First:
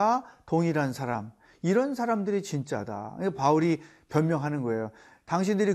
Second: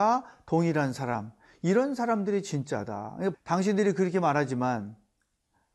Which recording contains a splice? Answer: second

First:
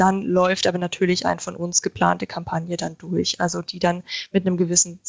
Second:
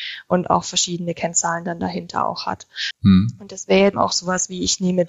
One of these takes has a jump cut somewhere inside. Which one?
second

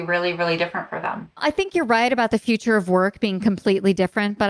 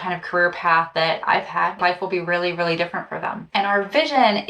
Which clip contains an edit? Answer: second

